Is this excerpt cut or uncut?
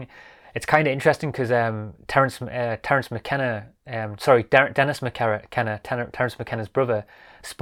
uncut